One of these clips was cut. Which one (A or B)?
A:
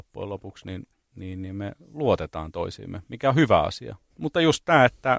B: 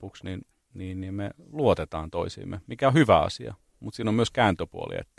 A